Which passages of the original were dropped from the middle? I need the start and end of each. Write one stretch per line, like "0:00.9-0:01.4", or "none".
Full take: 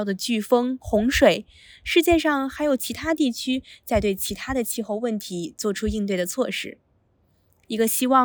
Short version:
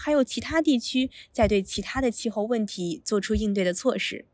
none